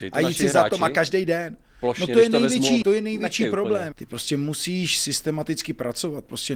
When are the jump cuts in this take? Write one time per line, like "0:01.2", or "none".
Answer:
0:02.8
0:03.9